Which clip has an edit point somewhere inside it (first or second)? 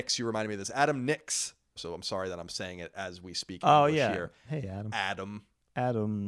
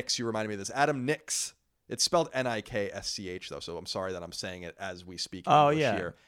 first